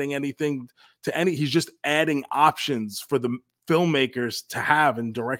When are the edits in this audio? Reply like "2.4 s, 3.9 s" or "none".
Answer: none